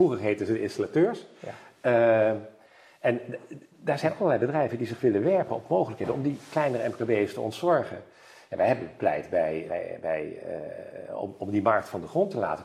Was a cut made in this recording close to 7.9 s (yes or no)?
no